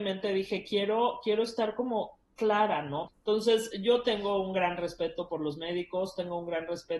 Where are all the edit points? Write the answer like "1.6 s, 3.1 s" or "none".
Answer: 3.1 s